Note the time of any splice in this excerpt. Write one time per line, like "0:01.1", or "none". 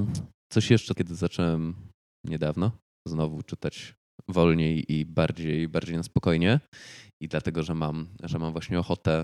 0:00.9